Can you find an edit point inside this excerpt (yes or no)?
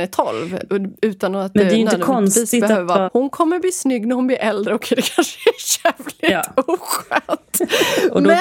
yes